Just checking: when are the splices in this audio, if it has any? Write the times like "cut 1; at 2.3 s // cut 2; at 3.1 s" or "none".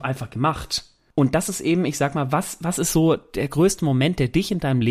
none